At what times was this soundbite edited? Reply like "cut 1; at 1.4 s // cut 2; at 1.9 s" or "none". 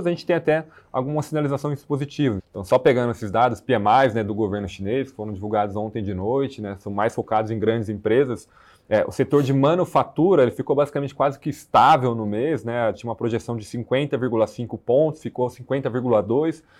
cut 1; at 2.4 s